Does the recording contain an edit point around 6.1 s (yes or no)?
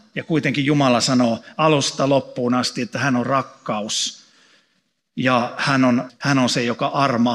yes